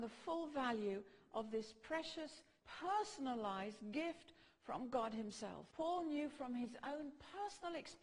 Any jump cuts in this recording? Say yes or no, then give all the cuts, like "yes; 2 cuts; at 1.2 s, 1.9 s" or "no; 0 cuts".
yes; 2 cuts; at 2.6 s, 5.7 s